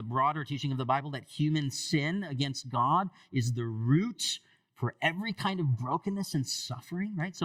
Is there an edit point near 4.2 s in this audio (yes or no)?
no